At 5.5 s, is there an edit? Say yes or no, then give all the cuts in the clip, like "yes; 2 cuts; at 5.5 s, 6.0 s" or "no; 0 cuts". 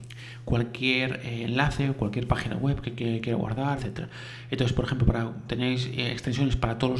yes; 2 cuts; at 3.8 s, 5.5 s